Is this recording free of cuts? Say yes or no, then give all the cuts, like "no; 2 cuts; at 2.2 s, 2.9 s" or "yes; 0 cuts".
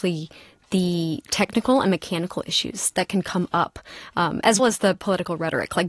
no; 1 cut; at 4.6 s